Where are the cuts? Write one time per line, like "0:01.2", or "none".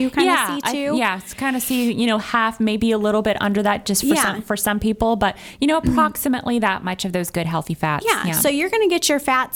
none